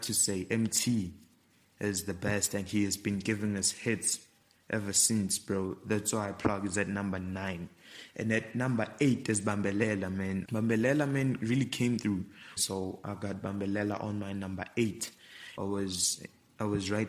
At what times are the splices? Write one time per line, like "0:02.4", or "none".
0:10.4
0:12.6
0:15.6